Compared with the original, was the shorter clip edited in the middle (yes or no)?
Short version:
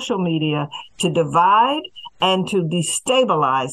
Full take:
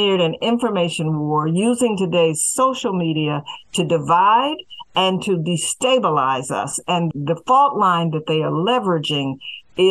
no